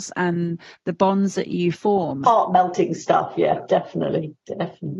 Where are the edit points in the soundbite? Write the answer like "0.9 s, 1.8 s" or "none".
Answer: 2.2 s